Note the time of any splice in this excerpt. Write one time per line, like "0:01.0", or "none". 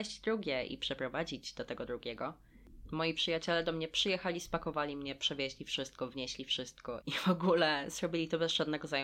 0:07.0